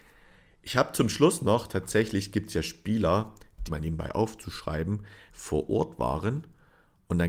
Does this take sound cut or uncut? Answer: cut